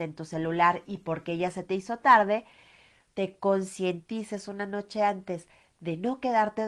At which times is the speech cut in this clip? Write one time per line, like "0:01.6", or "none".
0:03.1